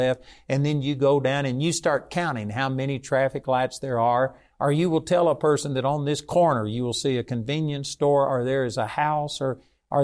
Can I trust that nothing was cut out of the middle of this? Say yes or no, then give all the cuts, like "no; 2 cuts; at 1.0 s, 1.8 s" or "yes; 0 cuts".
yes; 0 cuts